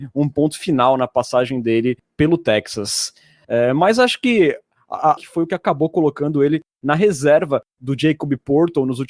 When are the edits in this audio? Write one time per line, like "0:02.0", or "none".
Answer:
0:03.4
0:05.2